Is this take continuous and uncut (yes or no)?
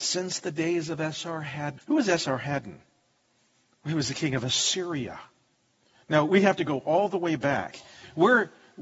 no